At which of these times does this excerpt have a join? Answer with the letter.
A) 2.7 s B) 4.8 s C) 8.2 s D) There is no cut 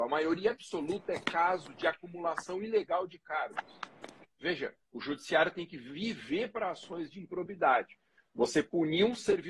B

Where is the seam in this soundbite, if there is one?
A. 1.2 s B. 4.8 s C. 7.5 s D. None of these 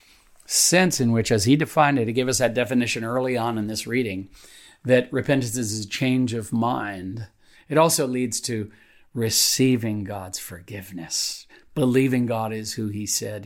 C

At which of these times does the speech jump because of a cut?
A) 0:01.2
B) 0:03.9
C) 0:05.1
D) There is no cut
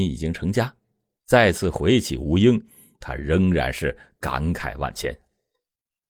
D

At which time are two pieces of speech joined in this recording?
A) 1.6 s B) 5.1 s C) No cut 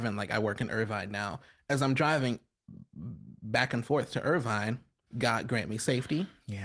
B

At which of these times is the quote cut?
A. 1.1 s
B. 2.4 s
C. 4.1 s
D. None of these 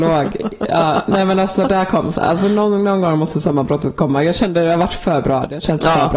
D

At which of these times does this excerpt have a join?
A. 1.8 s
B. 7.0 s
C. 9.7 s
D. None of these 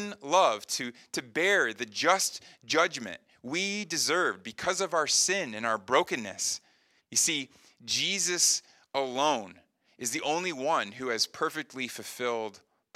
B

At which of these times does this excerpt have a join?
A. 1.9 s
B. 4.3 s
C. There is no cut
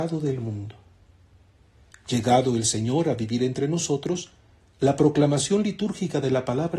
A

